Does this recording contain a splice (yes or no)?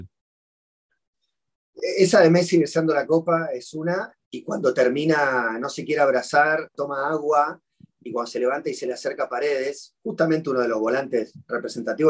yes